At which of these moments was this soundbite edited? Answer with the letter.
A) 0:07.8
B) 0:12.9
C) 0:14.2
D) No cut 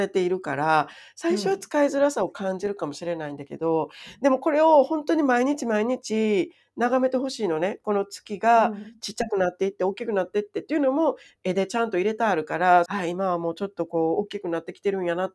B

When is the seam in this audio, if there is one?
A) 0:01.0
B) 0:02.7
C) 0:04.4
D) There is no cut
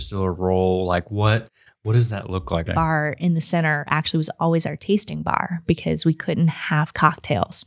B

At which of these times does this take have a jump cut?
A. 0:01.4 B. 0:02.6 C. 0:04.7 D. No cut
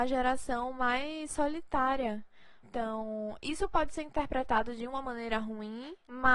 B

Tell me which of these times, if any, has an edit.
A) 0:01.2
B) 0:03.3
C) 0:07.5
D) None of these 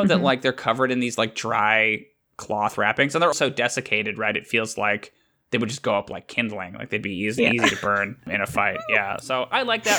B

